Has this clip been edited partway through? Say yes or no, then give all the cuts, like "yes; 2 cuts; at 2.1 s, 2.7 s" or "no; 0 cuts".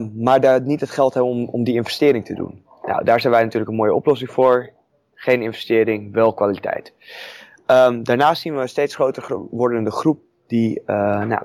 no; 0 cuts